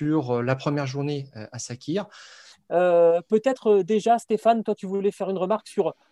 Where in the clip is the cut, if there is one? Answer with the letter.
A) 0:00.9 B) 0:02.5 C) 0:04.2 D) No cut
B